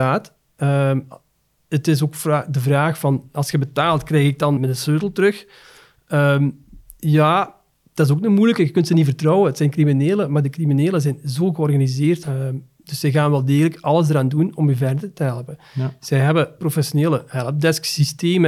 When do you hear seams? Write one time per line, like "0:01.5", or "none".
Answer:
0:04.6
0:12.2
0:16.6